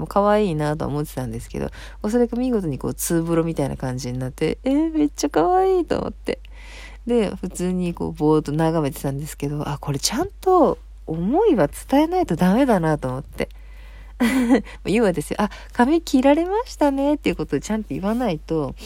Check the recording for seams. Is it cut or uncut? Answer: cut